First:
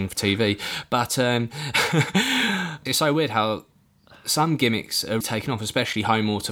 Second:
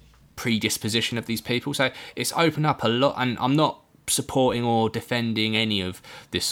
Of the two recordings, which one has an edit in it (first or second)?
first